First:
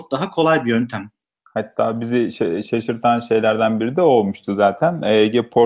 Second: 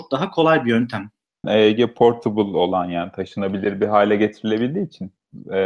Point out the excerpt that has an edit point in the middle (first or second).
second